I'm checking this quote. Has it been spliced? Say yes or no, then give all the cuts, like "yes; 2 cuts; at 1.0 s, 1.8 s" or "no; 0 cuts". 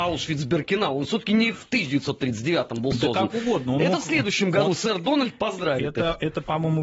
yes; 1 cut; at 4.6 s